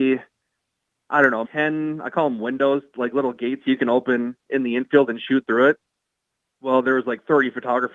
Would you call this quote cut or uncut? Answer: cut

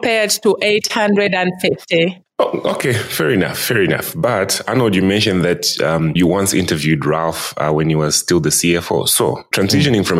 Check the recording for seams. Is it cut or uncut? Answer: uncut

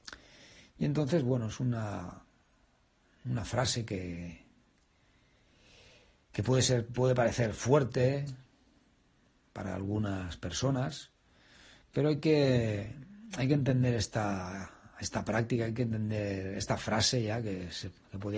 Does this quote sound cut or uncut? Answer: uncut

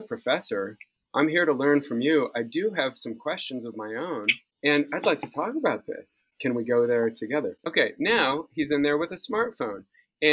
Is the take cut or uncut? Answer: cut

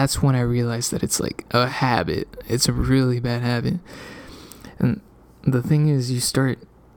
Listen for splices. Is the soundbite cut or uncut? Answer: uncut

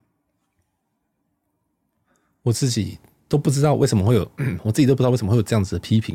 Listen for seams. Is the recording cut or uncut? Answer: uncut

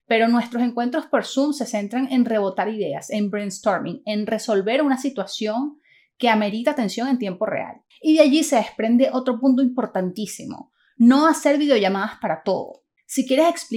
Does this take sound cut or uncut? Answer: uncut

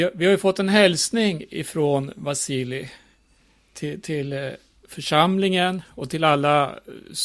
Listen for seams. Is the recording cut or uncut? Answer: uncut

